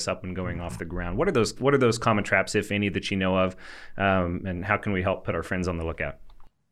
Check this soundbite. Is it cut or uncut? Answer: uncut